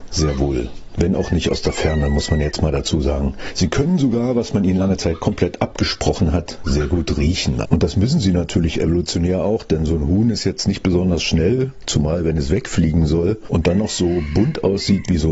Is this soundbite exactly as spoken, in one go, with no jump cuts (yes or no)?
no